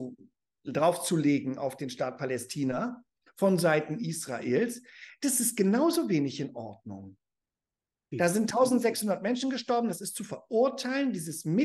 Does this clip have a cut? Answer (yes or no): yes